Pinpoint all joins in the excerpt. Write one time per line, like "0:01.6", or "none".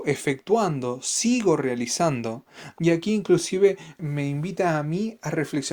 0:02.8

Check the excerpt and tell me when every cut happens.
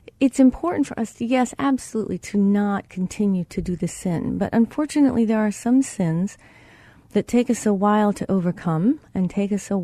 none

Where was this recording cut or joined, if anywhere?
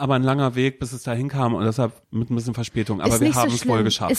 0:02.0

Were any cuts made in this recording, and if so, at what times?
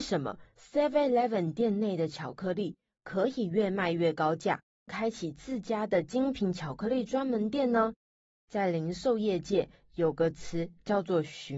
0:04.9

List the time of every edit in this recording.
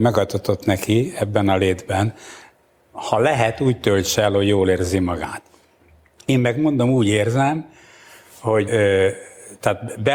0:08.7

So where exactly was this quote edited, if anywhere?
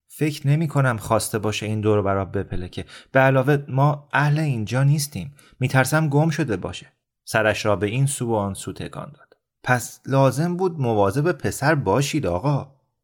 none

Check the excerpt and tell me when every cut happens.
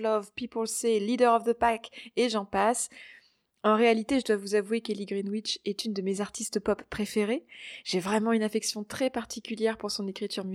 none

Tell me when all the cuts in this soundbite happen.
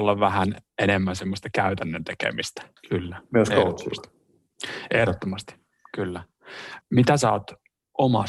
0:02.8
0:06.8

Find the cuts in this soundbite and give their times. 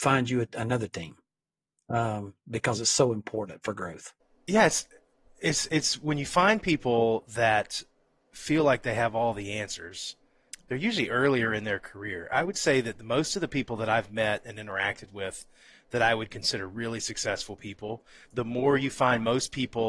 0:10.5
0:18.3

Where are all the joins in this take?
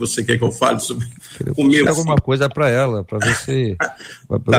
0:01.9

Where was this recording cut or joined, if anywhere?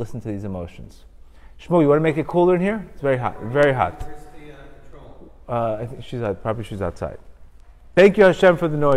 none

